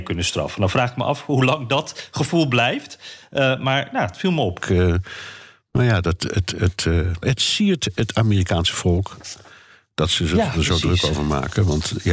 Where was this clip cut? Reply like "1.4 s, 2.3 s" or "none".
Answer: 4.6 s, 7.2 s